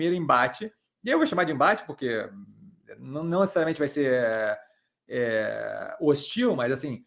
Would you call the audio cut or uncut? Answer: uncut